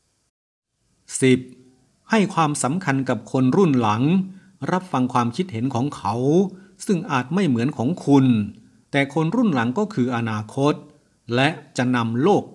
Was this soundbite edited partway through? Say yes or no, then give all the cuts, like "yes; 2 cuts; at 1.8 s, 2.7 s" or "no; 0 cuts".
no; 0 cuts